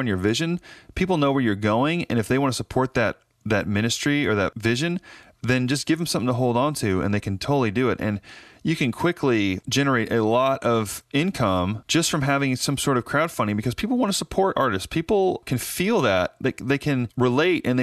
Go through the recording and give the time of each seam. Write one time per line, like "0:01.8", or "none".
none